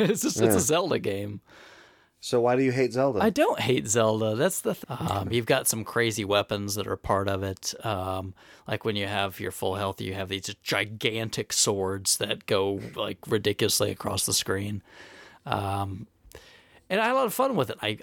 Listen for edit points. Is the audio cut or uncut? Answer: cut